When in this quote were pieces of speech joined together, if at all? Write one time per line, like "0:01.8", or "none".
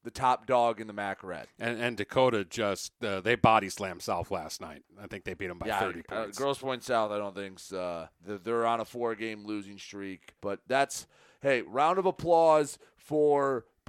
0:08.2
0:10.4